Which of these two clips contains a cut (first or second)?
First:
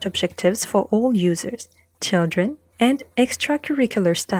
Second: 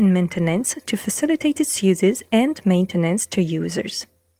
first